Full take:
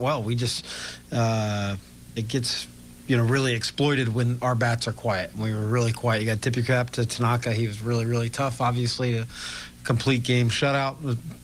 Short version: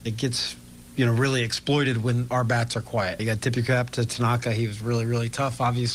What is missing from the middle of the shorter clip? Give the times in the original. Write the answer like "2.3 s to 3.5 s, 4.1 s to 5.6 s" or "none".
5.3 s to 6.2 s